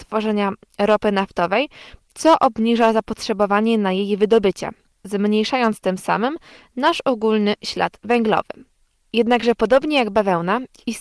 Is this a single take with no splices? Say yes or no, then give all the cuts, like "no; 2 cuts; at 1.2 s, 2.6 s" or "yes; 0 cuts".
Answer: no; 1 cut; at 9.0 s